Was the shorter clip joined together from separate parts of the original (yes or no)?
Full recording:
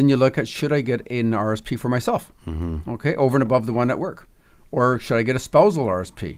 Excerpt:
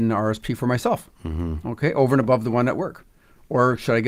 no